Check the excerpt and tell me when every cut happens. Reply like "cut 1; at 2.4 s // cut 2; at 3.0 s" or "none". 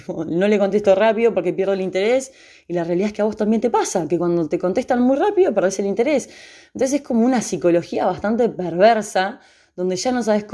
none